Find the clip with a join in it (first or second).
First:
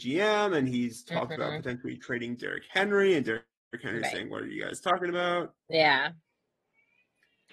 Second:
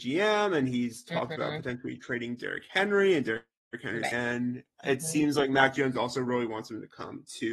second